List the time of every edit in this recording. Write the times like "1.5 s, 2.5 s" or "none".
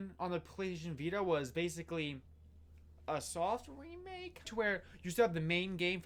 4.4 s